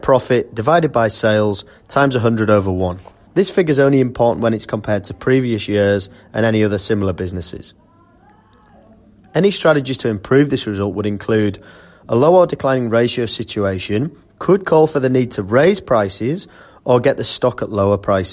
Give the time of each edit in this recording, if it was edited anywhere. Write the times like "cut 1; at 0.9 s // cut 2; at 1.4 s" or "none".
cut 1; at 3.3 s